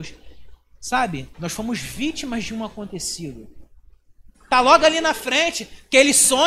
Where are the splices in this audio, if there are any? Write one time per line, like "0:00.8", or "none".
0:01.3
0:04.3